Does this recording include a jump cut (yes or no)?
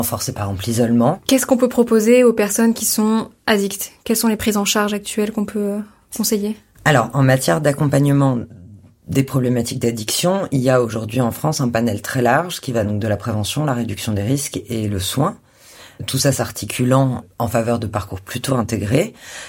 no